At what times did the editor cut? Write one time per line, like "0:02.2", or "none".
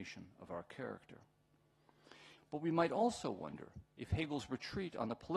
0:02.4